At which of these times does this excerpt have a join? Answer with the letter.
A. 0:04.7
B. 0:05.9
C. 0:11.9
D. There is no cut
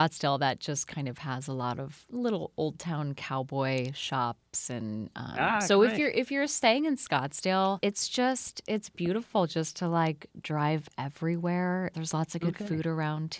C